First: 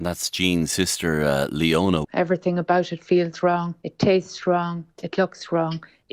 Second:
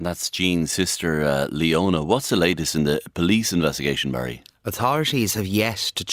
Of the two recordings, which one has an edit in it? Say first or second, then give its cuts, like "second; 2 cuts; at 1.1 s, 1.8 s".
first; 1 cut; at 2.0 s